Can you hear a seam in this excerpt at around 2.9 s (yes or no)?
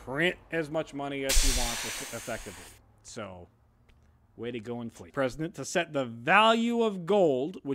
no